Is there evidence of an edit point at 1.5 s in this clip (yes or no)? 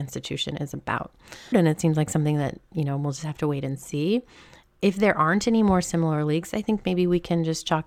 yes